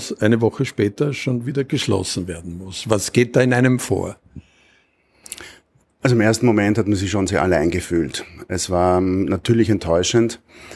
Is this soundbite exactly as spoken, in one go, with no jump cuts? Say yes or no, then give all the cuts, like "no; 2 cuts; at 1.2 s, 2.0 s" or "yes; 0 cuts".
yes; 0 cuts